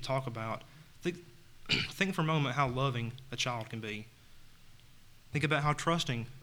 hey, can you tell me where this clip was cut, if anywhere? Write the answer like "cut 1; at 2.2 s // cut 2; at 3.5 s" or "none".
cut 1; at 5.3 s